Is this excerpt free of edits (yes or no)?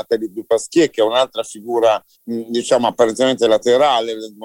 no